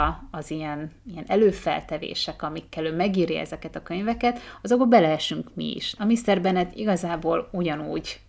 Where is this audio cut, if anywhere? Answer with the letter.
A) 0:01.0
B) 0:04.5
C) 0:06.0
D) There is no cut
C